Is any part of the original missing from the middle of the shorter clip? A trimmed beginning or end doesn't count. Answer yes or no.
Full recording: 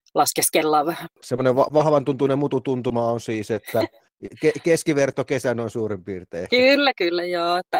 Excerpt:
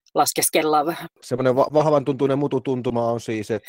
no